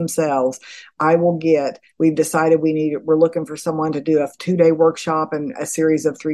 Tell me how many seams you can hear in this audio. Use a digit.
1